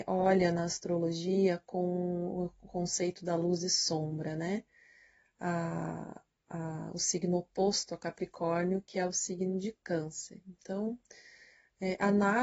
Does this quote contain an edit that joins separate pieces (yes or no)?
no